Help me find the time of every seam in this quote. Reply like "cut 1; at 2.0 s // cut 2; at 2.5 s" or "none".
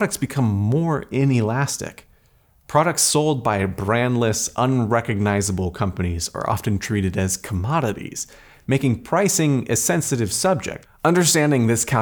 cut 1; at 8.6 s // cut 2; at 10.8 s